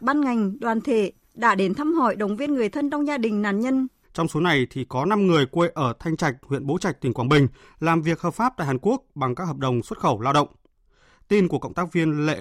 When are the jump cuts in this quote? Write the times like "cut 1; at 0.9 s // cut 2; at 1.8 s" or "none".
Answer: cut 1; at 4.0 s